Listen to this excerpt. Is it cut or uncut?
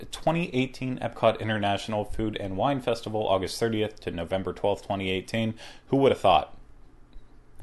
uncut